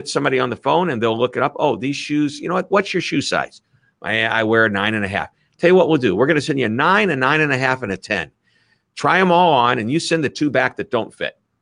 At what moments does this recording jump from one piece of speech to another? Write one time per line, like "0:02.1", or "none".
0:02.7